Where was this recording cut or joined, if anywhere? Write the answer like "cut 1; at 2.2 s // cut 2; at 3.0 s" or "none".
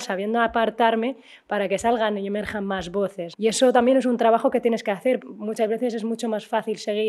cut 1; at 3.3 s // cut 2; at 5.2 s

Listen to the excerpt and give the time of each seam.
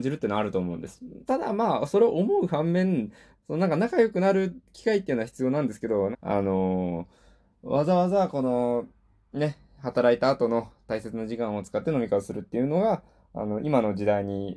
cut 1; at 1.3 s // cut 2; at 3.3 s // cut 3; at 6.1 s

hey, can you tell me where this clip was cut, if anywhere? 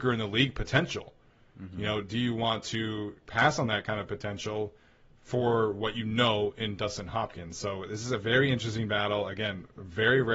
none

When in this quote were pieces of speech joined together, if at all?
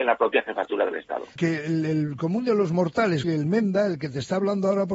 cut 1; at 1.4 s // cut 2; at 3.2 s

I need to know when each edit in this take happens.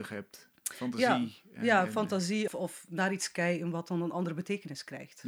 cut 1; at 2.5 s

